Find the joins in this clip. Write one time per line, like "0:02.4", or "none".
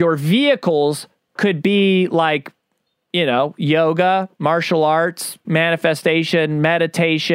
0:05.4

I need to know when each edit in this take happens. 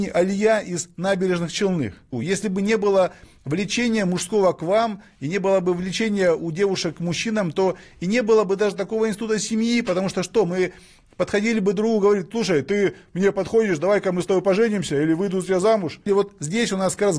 0:02.1
0:16.1

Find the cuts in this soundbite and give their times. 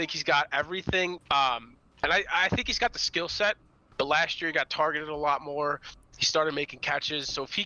0:01.2
0:03.9

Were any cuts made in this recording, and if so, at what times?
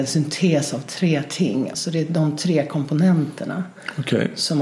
0:01.7

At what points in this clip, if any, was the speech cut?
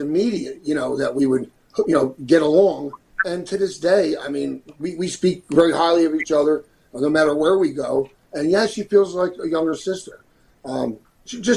none

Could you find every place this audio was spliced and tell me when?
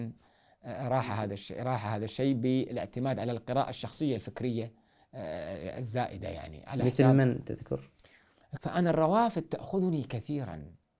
0:08.6

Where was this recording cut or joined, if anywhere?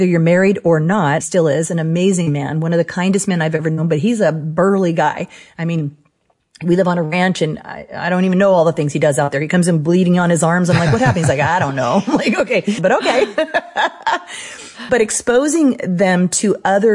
0:01.2
0:12.8
0:14.9

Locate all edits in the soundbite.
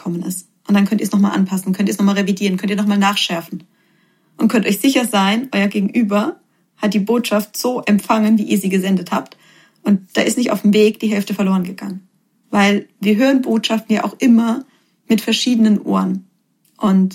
none

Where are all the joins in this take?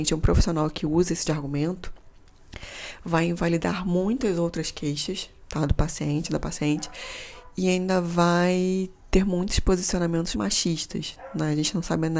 0:01.2
0:10.3

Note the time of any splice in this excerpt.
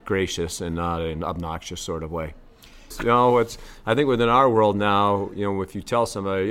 0:02.9

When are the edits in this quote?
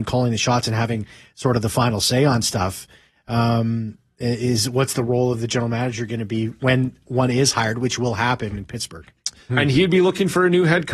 0:09.5

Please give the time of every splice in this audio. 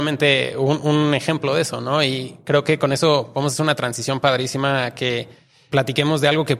none

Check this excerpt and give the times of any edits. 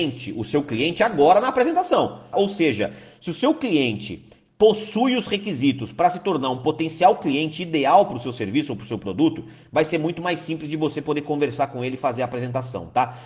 0:02.3

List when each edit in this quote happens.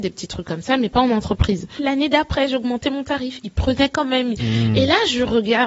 0:01.8

